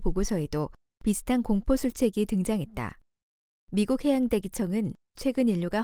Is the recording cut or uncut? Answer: cut